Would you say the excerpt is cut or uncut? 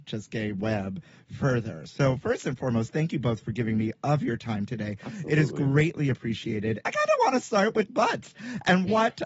cut